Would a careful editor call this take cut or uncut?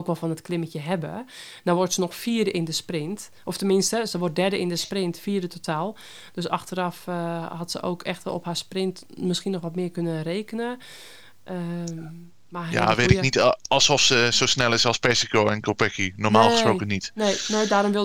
uncut